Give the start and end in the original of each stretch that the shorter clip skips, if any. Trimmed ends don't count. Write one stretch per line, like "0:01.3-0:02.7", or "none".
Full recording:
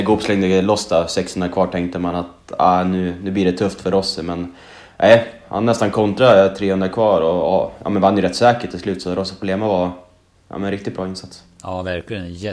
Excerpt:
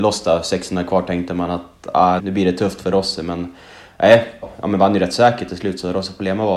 0:02.8-0:03.2
0:05.4-0:07.6